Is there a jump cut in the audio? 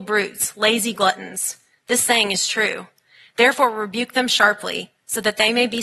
no; 0 cuts

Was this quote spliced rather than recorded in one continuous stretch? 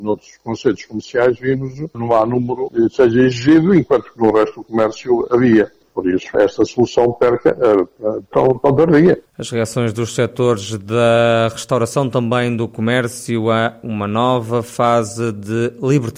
yes; 1 cut; at 8.3 s

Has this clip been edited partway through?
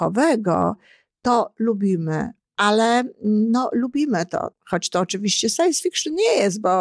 yes; 2 cuts; at 2.4 s, 4.5 s

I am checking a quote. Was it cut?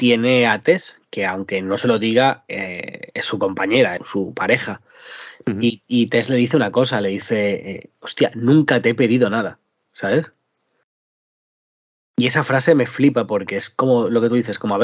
yes; 1 cut; at 4.0 s

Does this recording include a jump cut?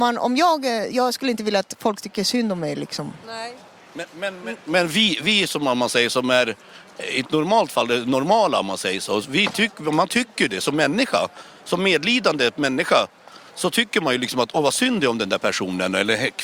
no; 0 cuts

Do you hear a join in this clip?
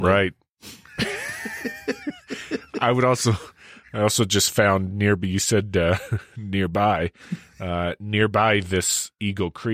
no; 0 cuts

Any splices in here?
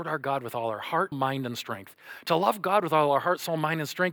yes; 1 cut; at 1.1 s

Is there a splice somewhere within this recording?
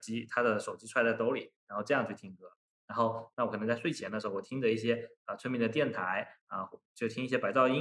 yes; 1 cut; at 3.3 s

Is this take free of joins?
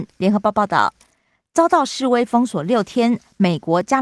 yes; 0 cuts

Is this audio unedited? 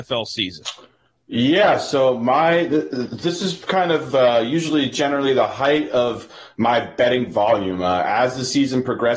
yes; 0 cuts

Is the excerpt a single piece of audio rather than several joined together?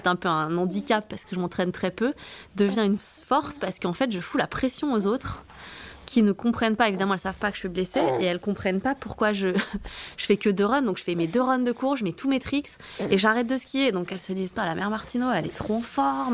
yes; 0 cuts

